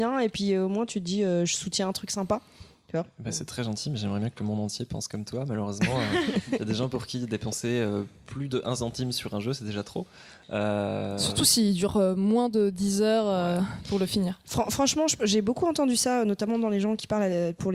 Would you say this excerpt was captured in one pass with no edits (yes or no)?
yes